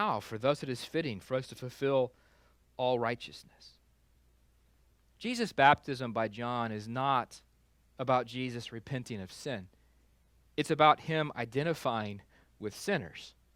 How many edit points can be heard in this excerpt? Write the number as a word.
zero